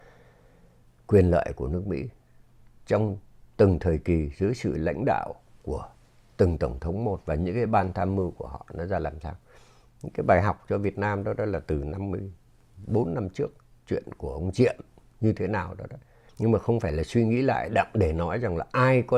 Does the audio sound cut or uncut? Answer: cut